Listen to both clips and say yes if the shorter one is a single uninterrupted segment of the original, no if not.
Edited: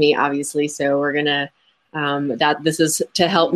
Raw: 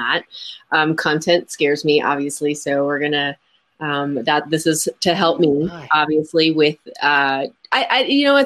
yes